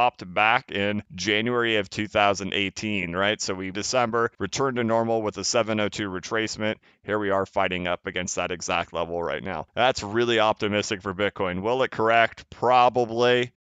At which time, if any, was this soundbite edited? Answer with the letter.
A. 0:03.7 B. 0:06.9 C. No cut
A